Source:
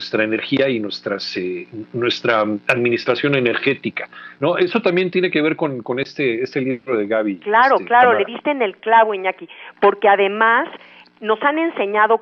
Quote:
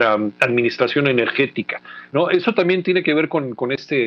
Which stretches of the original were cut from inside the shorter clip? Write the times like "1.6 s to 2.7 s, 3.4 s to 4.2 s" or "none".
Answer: none